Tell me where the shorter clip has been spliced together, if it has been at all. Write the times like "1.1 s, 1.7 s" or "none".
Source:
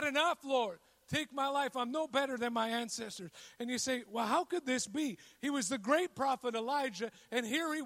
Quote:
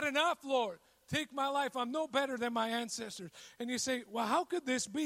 none